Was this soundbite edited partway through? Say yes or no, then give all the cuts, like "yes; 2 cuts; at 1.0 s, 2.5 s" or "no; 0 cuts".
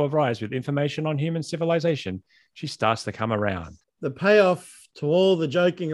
yes; 1 cut; at 3.8 s